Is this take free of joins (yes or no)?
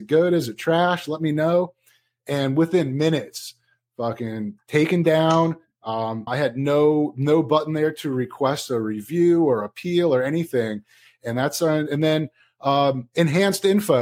no